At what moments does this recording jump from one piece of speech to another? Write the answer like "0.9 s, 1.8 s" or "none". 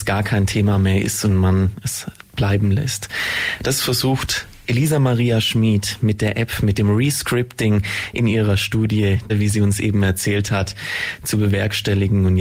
9.3 s